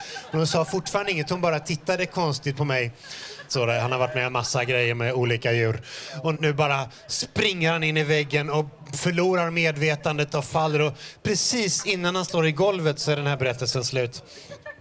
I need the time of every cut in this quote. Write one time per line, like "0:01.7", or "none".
0:03.5
0:06.3